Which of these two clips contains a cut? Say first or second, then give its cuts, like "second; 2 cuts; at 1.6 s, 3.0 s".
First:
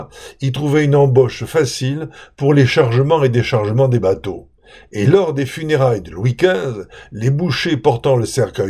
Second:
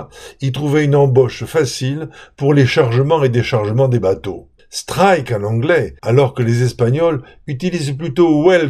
second; 2 cuts; at 4.6 s, 6.0 s